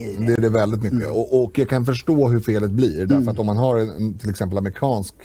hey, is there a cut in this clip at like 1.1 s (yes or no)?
no